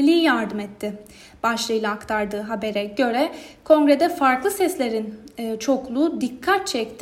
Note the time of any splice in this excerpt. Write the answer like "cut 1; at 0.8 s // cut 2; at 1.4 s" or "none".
none